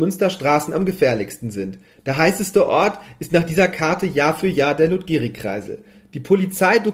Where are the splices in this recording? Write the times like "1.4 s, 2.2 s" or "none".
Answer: none